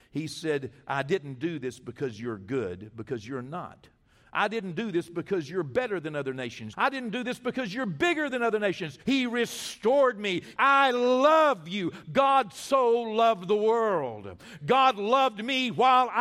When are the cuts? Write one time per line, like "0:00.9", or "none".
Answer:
0:06.7
0:09.0
0:10.6